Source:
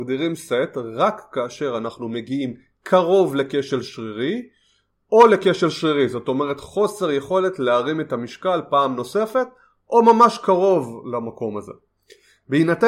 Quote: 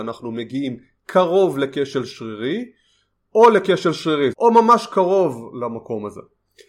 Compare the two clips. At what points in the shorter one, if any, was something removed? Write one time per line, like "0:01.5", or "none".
0:04.3